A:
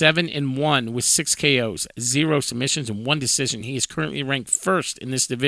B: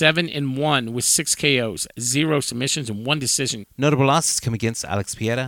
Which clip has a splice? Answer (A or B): B